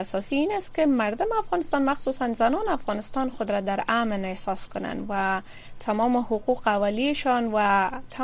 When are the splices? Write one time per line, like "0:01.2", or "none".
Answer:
none